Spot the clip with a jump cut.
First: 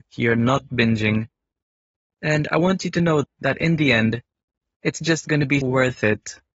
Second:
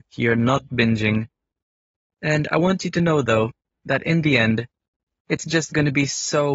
first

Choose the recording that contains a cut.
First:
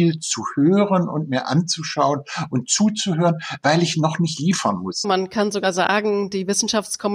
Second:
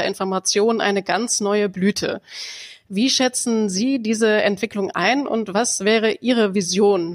first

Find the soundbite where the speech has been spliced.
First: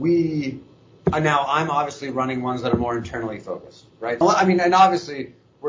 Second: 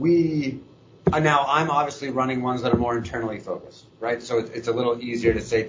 first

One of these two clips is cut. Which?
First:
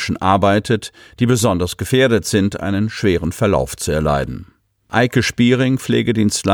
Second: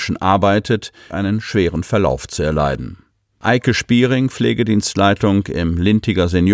second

